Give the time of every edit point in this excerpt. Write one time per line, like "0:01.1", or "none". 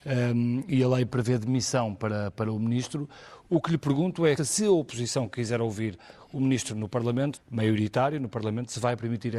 0:04.4
0:07.3